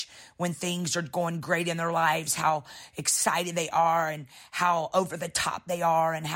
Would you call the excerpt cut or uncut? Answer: uncut